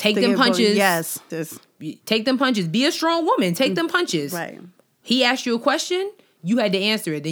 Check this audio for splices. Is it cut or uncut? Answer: cut